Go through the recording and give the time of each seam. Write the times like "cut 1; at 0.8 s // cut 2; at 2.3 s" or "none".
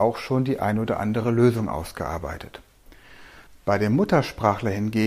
cut 1; at 3.5 s